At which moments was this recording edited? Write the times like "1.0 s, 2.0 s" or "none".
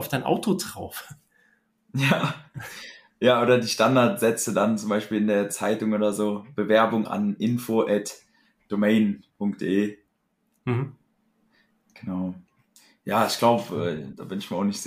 7.1 s